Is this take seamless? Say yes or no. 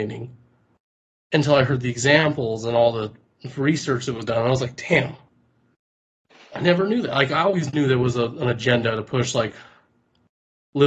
yes